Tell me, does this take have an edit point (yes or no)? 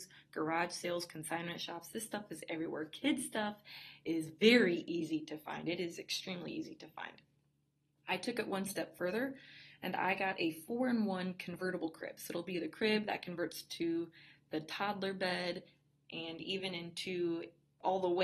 no